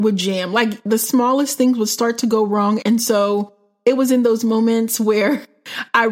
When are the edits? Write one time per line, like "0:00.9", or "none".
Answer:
0:02.8

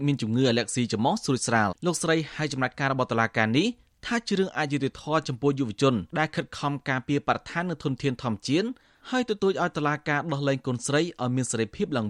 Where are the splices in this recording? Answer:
0:01.7
0:06.1

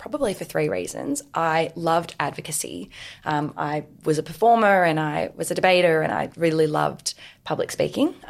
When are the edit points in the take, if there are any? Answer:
none

